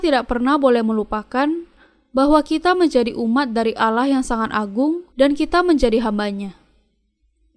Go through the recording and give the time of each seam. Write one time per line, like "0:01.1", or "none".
0:05.1